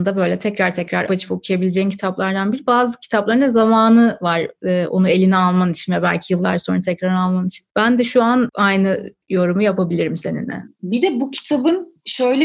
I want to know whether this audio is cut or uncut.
cut